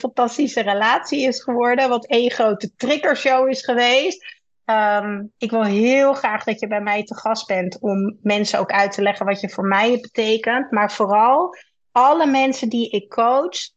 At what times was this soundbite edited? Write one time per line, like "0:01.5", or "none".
0:05.4